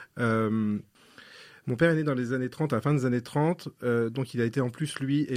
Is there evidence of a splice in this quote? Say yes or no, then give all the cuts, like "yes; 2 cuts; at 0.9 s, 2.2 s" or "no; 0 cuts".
no; 0 cuts